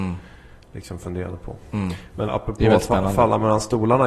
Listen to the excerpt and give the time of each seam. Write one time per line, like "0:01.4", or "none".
0:02.3